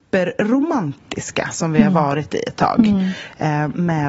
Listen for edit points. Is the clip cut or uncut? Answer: uncut